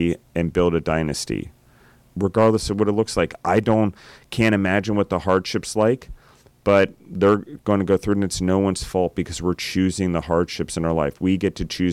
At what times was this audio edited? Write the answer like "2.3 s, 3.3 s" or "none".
none

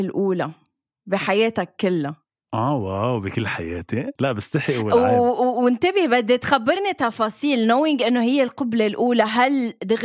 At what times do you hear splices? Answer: 4.2 s

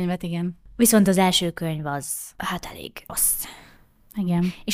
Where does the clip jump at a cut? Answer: 3.1 s

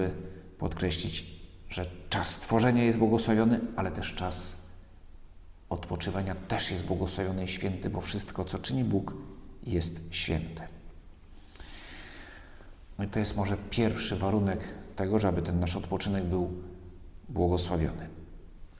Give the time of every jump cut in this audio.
13.0 s

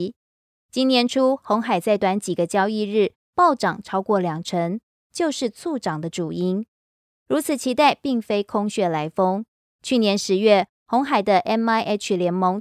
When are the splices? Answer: 2.0 s, 5.0 s

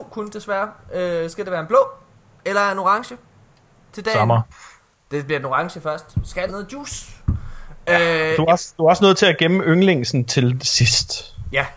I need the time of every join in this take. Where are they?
6.5 s

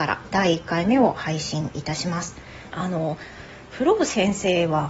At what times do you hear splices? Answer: 2.7 s

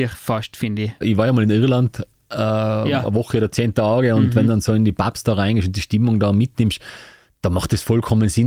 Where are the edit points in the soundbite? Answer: 1.0 s

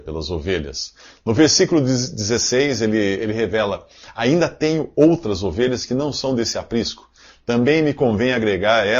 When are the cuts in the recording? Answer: none

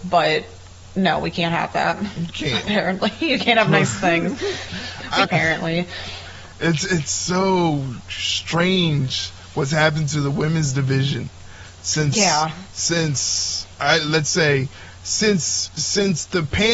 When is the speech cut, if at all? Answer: 5.2 s

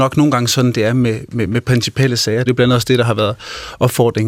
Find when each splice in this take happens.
2.5 s

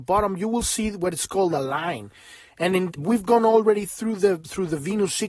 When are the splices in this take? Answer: 3.0 s

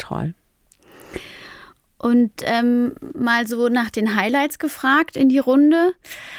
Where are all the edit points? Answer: none

